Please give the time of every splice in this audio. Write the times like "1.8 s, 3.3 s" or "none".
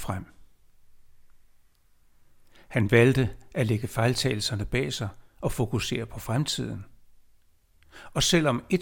none